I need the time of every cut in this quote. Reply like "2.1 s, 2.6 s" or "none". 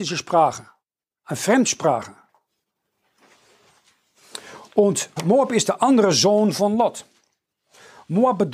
5.2 s

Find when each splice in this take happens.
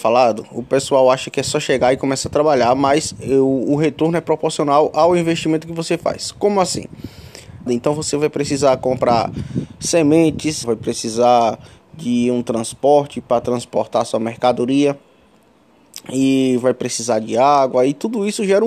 7.7 s, 10.6 s

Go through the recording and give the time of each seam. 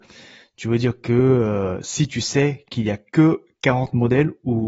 none

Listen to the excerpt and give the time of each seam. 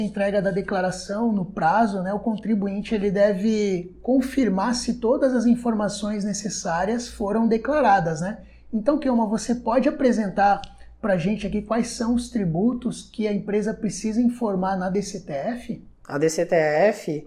none

